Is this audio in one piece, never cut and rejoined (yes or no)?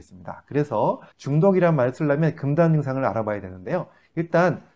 no